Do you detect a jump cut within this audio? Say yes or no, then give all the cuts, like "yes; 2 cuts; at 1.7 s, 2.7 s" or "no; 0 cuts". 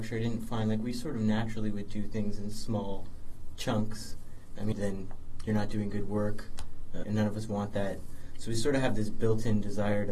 yes; 2 cuts; at 4.7 s, 7.0 s